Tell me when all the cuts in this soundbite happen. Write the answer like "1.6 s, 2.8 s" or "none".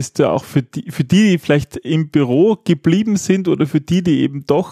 none